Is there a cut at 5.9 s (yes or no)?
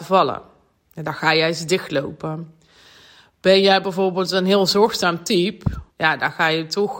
yes